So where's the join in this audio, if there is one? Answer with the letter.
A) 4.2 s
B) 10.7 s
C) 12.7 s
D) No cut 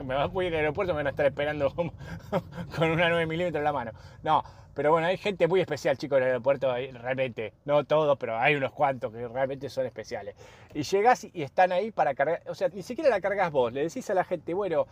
C